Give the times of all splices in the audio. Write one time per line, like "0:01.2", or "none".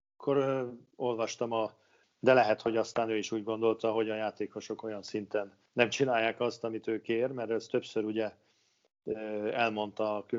0:02.0
0:05.7